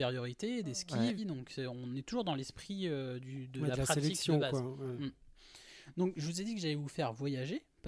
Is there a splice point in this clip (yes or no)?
yes